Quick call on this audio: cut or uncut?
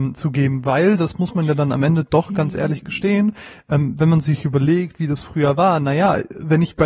uncut